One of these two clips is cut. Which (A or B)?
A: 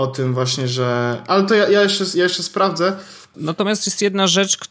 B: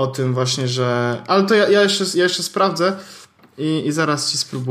A